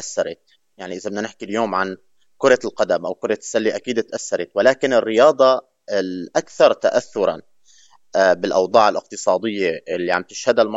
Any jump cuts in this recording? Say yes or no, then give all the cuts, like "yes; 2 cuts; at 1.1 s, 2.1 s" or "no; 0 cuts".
no; 0 cuts